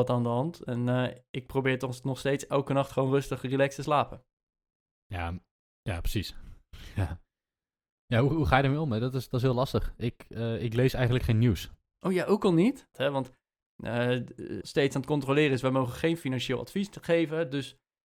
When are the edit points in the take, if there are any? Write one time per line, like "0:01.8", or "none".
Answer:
0:12.9
0:14.6